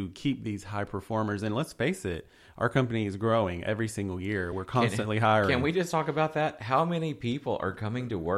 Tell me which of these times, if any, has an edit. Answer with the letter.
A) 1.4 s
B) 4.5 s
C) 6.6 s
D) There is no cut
D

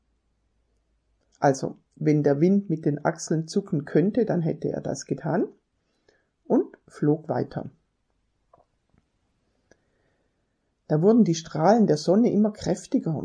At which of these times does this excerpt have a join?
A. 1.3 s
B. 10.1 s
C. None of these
A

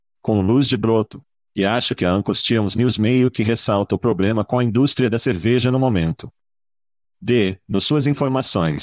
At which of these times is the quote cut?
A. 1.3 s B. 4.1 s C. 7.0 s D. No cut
C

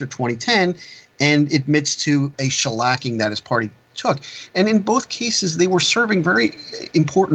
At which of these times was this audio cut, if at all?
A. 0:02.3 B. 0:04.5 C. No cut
A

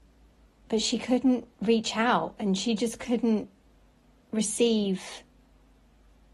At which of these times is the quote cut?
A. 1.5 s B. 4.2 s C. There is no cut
A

